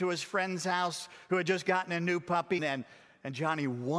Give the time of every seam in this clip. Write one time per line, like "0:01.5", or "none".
0:02.6